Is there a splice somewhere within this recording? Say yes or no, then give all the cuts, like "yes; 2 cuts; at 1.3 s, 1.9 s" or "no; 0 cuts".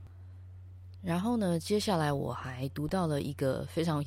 no; 0 cuts